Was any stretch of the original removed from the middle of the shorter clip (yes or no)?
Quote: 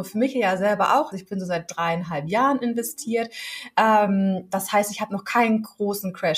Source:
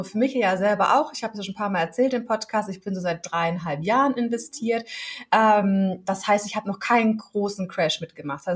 yes